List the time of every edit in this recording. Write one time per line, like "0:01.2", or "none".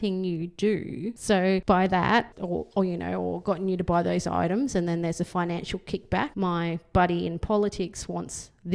0:02.3
0:06.3